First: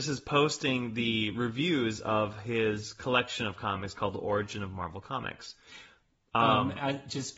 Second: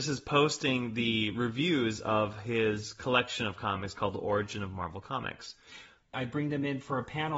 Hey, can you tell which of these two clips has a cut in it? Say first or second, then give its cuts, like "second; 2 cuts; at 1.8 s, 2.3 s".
second; 1 cut; at 6.1 s